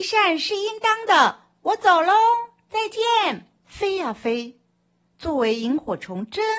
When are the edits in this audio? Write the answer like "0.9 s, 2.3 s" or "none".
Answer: 3.6 s